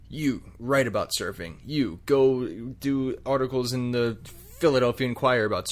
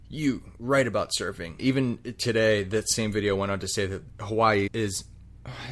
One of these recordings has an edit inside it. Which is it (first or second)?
second